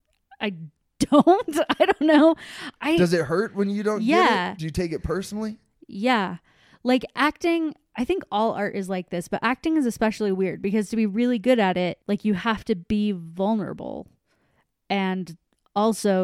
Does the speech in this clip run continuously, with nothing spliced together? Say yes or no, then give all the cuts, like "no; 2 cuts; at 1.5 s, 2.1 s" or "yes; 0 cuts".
no; 1 cut; at 12.0 s